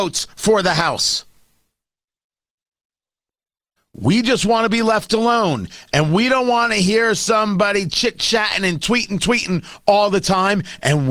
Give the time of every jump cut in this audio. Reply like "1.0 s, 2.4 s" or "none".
none